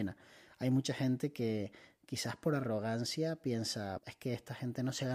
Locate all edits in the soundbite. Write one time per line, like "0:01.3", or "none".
0:04.0